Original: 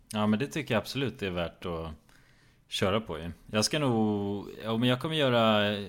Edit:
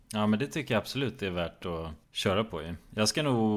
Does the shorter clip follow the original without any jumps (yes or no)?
no